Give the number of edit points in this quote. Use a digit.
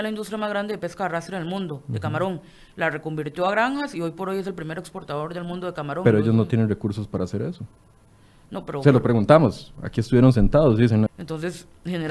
1